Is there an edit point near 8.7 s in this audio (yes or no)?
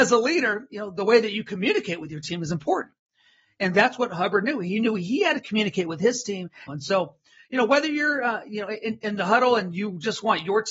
no